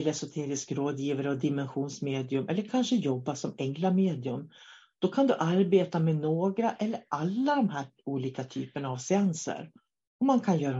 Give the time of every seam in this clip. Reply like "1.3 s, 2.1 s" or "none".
none